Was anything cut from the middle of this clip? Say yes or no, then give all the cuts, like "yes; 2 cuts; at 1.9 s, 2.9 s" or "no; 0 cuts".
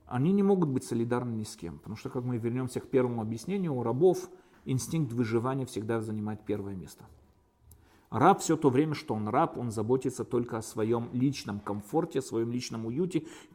no; 0 cuts